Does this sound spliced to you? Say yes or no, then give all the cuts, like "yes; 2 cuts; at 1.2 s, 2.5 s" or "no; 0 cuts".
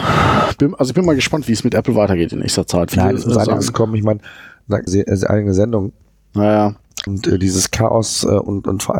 yes; 3 cuts; at 2.9 s, 4.9 s, 7.1 s